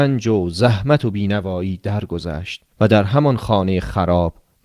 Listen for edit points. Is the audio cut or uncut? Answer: cut